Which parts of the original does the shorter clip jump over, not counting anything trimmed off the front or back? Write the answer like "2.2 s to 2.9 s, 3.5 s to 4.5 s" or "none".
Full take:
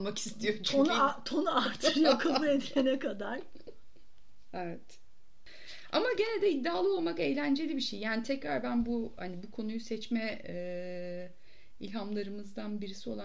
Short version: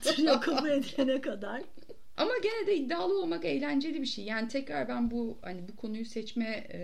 3.9 s to 5.9 s